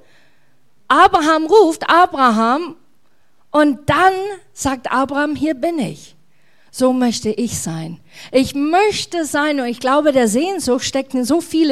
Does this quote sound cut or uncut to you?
uncut